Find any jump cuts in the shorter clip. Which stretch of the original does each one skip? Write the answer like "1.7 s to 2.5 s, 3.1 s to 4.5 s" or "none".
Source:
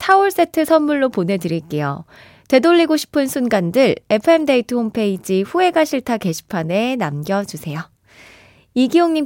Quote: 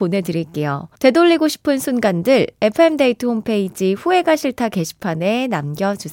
2.1 s to 2.4 s